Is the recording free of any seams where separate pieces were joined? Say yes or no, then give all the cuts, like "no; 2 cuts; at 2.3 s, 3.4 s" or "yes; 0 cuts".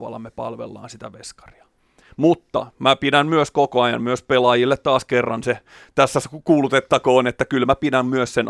yes; 0 cuts